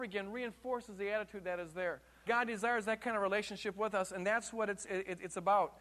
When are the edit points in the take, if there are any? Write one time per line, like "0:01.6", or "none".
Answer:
0:02.3